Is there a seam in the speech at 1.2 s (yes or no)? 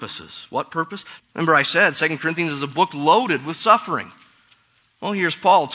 yes